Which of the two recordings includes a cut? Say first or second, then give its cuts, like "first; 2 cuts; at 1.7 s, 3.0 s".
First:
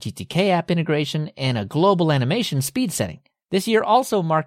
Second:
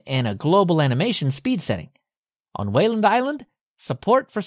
first; 1 cut; at 3.4 s